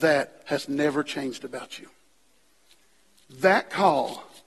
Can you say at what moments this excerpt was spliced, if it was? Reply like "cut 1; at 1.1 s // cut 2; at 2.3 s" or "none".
none